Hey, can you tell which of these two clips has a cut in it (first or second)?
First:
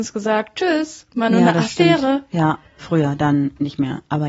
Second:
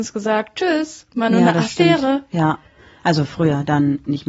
first